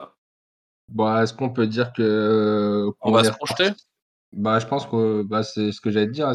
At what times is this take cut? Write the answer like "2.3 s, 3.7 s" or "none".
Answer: none